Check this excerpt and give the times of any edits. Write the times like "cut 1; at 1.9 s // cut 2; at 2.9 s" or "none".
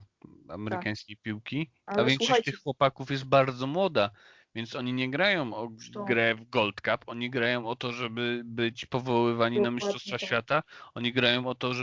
none